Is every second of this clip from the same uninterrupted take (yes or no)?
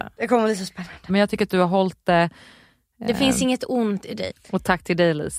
no